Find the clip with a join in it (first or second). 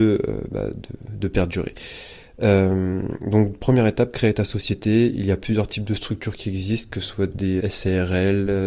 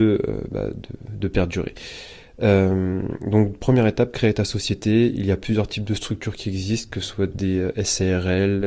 first